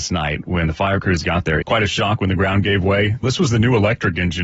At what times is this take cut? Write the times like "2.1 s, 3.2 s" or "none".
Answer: 1.6 s, 3.2 s

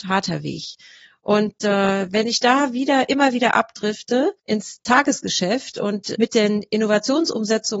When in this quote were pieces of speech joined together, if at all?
4.4 s, 6.1 s

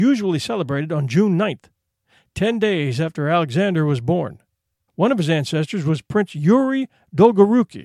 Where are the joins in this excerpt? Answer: 4.9 s

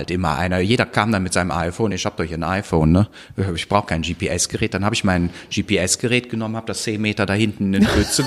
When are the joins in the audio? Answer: none

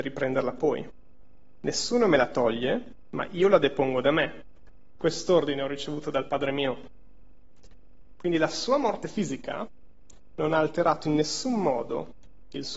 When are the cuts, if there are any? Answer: 5.0 s

